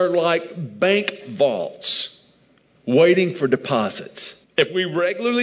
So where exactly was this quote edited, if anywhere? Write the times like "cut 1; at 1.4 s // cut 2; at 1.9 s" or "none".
cut 1; at 4.4 s

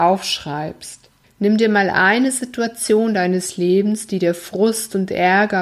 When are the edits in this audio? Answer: cut 1; at 1.2 s

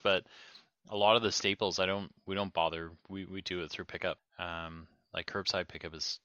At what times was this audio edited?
cut 1; at 4.2 s

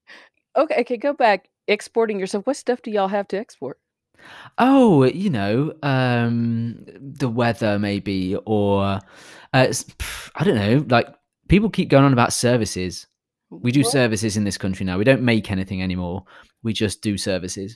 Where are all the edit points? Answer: none

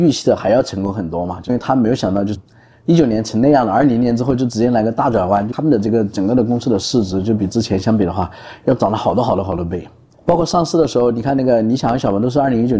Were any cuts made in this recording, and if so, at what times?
none

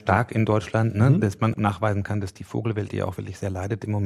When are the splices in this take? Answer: cut 1; at 1.5 s

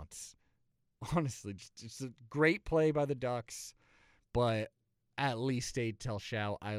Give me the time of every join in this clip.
cut 1; at 4.2 s

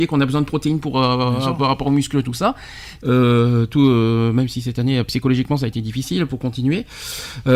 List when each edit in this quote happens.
cut 1; at 3.0 s // cut 2; at 6.3 s

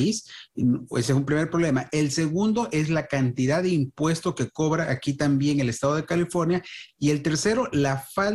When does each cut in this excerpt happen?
none

